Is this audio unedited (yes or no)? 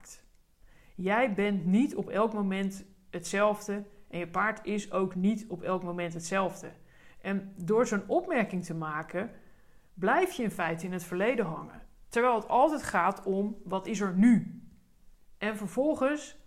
yes